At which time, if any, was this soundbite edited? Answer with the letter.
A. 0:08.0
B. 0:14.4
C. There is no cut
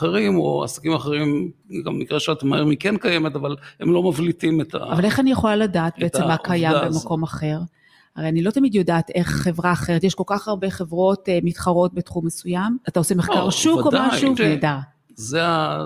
B